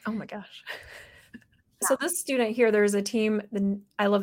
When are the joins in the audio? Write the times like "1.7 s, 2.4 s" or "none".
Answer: 1.8 s